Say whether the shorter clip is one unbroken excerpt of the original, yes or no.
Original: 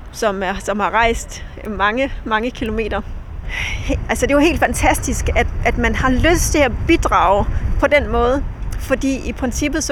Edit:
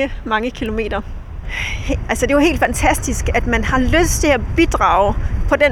no